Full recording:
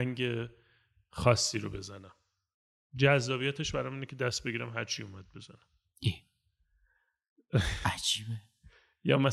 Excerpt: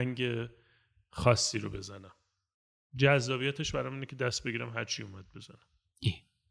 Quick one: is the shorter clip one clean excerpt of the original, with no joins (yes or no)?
yes